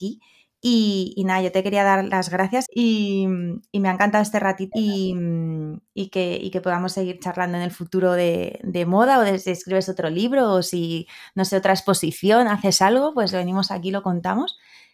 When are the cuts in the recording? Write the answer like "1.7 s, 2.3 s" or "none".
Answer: 2.7 s, 4.7 s

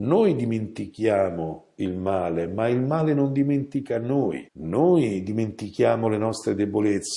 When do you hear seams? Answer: 4.5 s

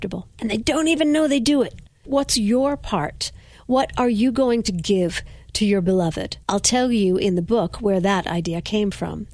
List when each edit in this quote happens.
2.0 s, 6.4 s

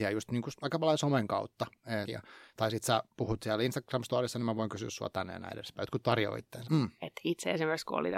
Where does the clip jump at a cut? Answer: 2.0 s, 6.6 s

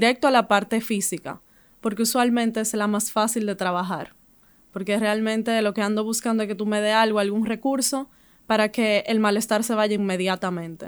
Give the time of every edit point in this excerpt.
none

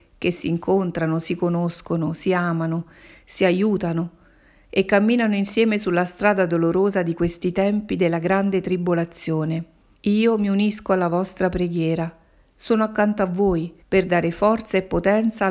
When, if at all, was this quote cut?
10.0 s, 13.8 s

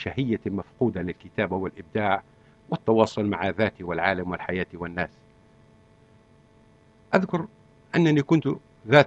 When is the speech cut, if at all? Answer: none

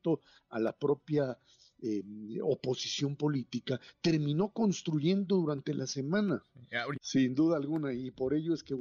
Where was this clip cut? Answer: 6.9 s

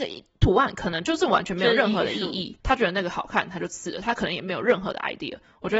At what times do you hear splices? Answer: none

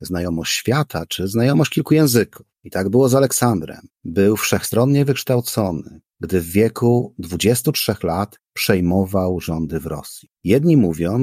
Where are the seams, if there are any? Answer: none

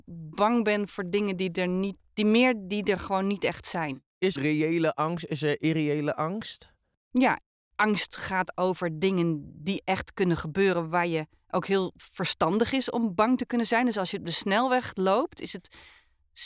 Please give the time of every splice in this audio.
4.4 s

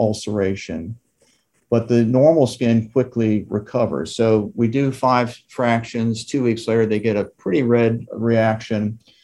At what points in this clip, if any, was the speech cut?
none

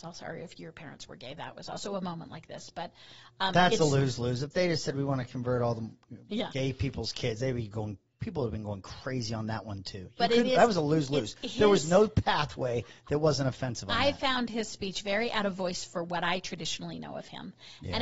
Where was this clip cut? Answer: none

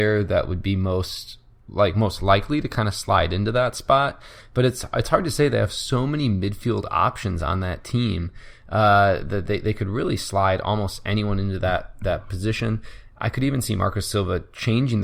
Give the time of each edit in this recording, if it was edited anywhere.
none

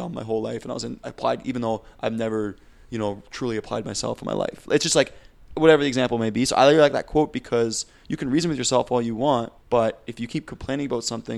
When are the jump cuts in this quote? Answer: 9.6 s

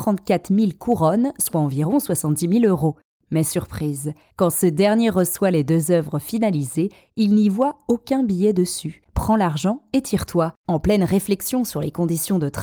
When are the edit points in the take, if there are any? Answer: 9.1 s, 10.7 s

